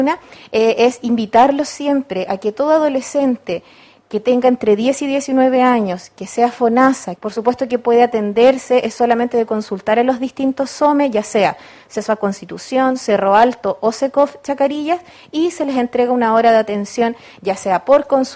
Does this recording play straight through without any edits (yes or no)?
no